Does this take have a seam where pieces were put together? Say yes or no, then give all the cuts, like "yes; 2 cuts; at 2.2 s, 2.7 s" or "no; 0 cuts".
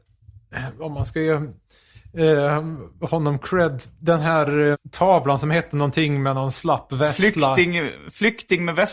yes; 1 cut; at 4.7 s